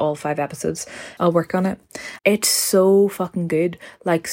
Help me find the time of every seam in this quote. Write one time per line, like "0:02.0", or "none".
0:01.2
0:02.2